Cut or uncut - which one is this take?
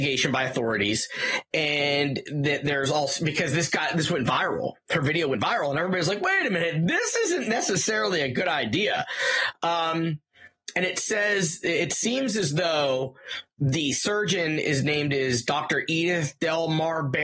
uncut